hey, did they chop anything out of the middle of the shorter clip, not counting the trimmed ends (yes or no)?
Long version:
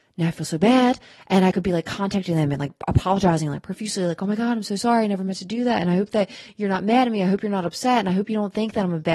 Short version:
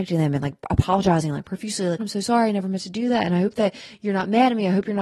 yes